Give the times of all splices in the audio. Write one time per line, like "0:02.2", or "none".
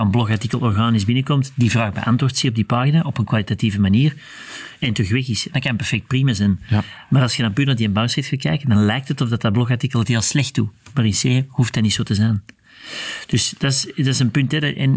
none

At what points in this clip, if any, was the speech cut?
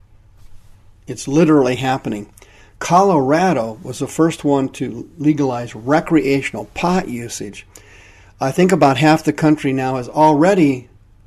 none

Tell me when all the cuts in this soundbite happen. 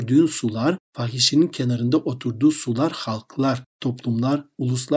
none

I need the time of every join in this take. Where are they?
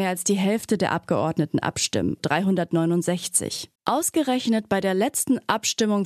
0:02.2
0:03.8

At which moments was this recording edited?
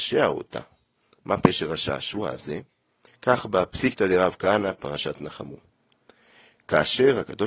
0:03.1
0:04.8

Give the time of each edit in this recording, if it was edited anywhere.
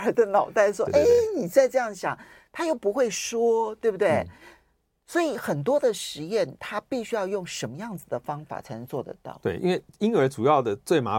none

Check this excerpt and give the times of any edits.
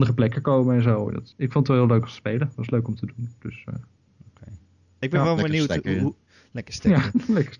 0:01.3

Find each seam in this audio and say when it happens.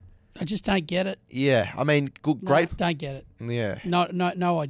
0:02.7

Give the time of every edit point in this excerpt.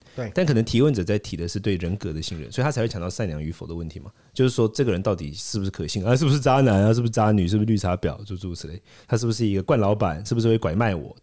none

